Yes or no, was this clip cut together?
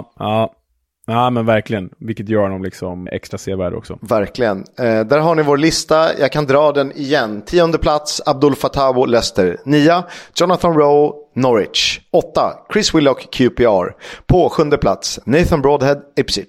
yes